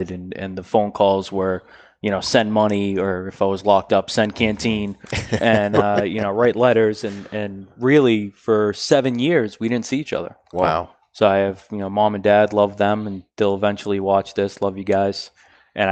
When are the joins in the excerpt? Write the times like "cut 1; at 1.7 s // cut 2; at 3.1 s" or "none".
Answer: none